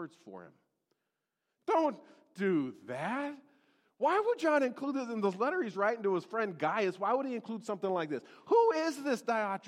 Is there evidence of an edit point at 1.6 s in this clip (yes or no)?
yes